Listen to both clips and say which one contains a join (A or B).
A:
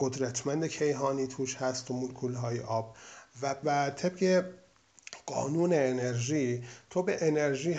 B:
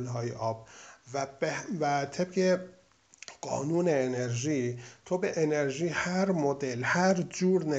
A